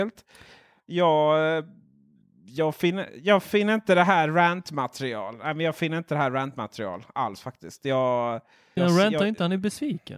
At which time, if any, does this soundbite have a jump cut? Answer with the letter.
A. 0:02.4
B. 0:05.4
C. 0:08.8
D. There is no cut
C